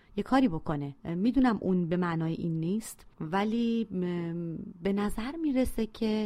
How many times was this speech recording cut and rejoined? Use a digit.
2